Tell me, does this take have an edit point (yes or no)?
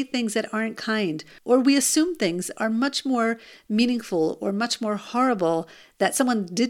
no